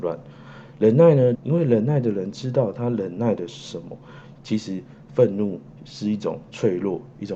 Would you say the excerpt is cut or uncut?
cut